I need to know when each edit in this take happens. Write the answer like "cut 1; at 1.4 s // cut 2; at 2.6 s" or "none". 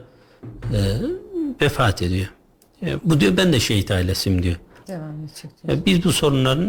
cut 1; at 3.0 s // cut 2; at 4.8 s